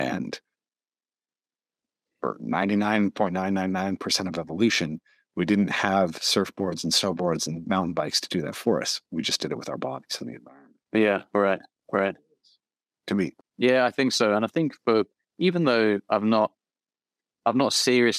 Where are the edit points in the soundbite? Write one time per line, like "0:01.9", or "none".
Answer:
0:13.4